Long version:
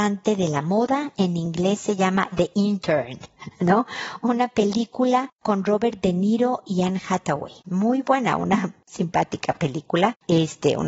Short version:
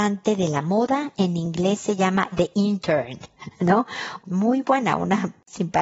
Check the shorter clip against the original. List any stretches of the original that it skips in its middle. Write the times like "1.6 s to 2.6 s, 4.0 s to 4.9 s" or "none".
4.2 s to 7.6 s

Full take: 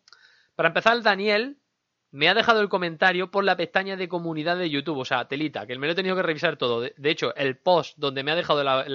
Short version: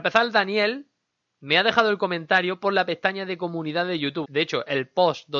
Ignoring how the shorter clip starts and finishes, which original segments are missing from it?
4.9 s to 6.9 s

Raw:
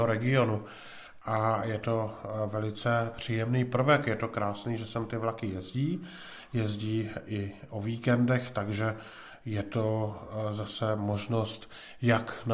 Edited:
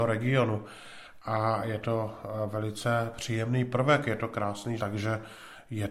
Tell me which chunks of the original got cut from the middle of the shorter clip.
4.8 s to 8.5 s

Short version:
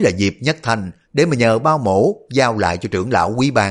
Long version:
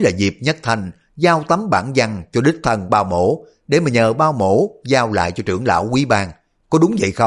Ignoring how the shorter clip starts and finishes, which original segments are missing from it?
1.0 s to 3.6 s

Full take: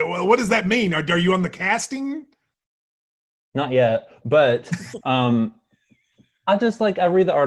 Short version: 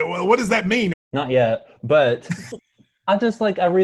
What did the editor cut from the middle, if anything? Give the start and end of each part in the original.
0.9 s to 3.3 s, 5.0 s to 6.0 s

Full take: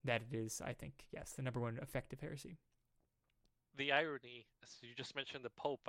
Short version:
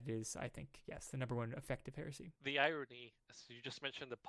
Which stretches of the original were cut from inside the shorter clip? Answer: 2.6 s to 3.7 s

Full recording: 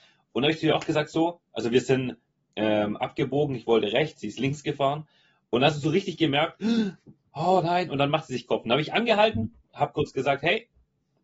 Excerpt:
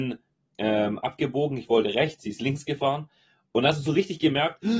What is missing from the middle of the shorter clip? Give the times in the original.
none

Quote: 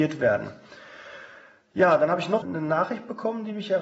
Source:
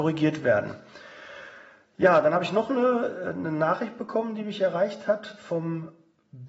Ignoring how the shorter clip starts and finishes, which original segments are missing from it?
2.7 s to 3.3 s

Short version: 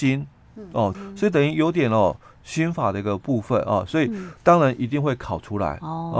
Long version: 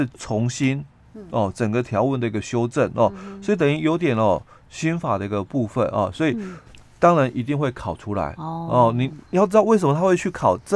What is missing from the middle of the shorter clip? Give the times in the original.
1.5 s to 3.2 s, 6.6 s to 6.9 s

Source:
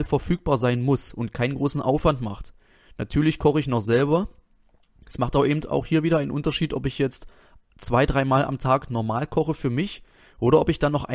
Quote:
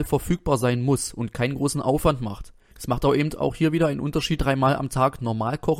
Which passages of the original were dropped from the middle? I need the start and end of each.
2.7 s to 5.0 s, 6.7 s to 8.1 s

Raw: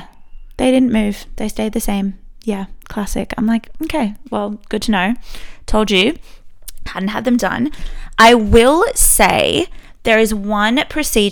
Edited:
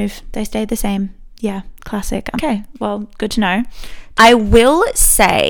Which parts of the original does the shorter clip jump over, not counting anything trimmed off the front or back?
3.4 s to 3.9 s, 5.7 s to 8.2 s

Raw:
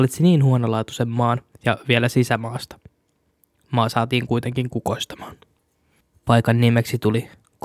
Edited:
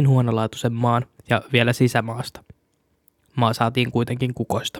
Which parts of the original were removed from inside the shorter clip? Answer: none

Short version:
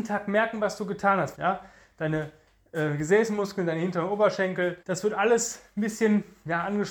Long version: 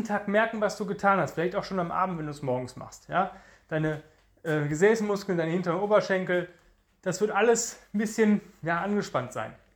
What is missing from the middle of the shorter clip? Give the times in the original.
1.3 s to 3.1 s, 6.5 s to 7.0 s

